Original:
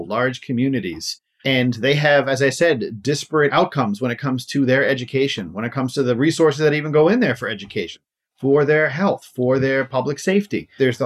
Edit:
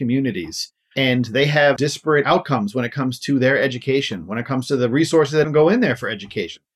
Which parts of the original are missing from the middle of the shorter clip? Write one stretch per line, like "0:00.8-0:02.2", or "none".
0:02.2-0:03.0
0:06.7-0:06.8